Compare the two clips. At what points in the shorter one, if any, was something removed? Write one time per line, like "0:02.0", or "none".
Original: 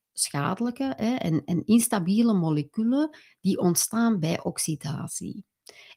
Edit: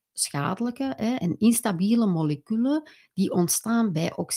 0:01.2

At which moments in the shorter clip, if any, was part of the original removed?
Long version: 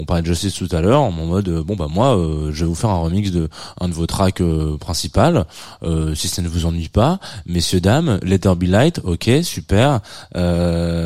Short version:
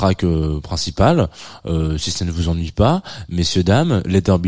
none

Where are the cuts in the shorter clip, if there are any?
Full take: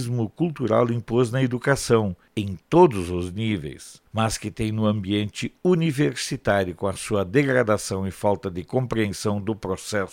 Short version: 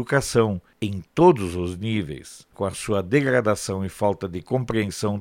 0:02.5

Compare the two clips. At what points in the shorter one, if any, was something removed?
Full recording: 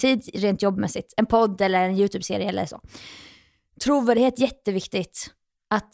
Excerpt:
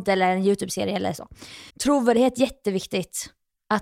0:01.7

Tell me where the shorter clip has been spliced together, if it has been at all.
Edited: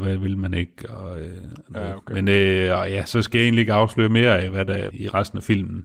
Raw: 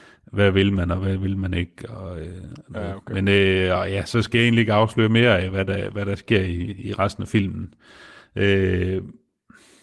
0:04.9

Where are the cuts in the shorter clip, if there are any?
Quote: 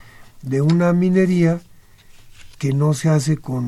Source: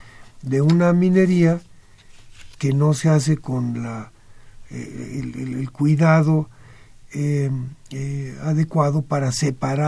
none

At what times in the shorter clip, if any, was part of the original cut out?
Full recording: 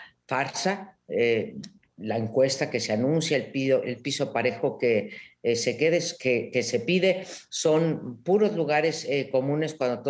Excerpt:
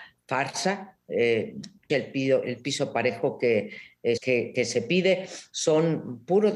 0:01.9
0:04.2

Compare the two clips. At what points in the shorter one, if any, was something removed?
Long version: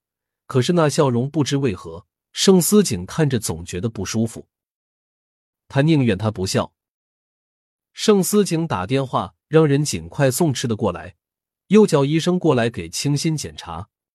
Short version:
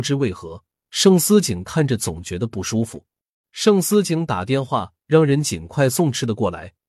0:03.4

